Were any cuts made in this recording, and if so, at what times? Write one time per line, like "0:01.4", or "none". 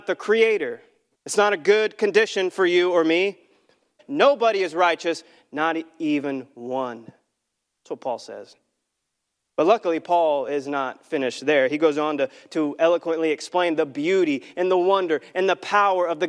0:01.1
0:04.0